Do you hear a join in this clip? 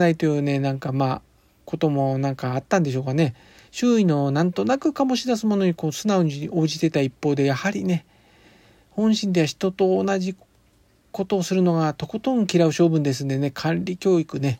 no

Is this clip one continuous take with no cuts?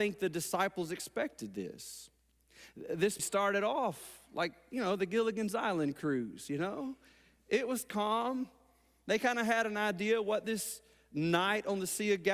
no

